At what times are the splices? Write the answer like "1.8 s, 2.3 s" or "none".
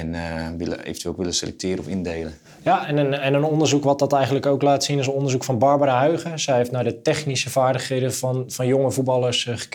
none